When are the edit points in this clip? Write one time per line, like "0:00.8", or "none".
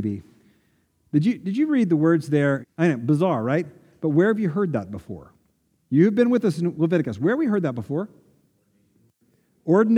0:02.6